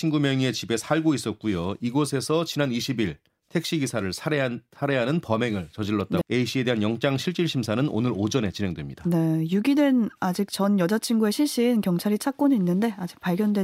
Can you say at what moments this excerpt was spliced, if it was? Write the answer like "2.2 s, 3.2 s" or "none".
6.2 s